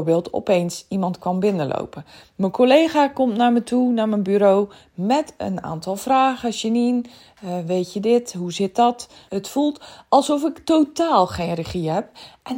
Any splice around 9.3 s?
yes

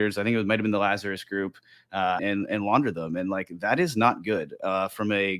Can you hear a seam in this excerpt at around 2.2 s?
yes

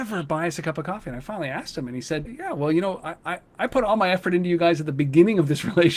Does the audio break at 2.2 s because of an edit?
yes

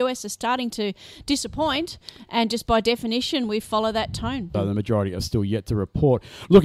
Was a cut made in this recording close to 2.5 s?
no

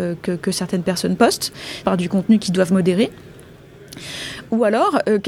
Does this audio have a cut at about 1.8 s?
yes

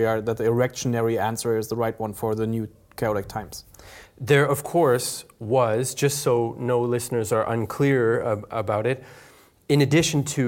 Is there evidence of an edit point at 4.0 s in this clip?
yes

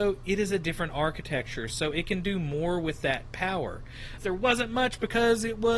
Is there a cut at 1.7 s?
no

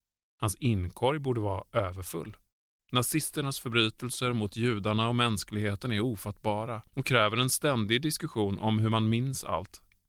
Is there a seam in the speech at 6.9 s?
yes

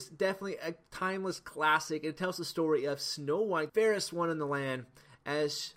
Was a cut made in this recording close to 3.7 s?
yes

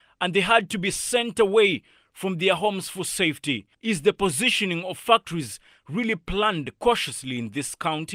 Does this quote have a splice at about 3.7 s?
yes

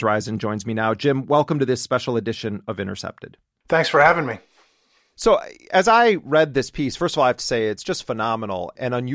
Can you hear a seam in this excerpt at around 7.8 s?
no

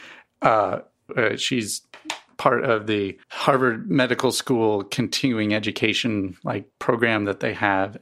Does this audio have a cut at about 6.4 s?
no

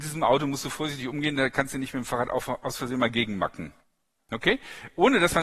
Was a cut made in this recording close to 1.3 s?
no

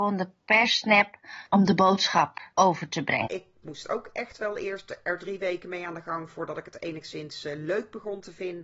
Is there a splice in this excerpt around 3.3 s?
yes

